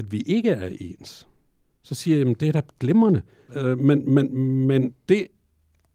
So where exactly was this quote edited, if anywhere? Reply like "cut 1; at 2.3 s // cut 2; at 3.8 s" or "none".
cut 1; at 3.5 s